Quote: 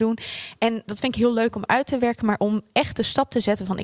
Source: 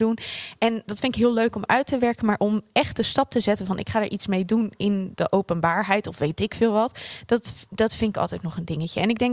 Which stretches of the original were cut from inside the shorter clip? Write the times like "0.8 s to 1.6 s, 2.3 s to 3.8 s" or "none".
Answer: none